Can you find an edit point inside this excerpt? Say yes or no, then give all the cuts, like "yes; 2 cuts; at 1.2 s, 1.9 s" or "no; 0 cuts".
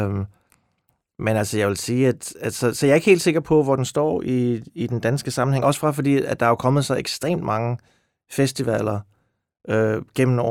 no; 0 cuts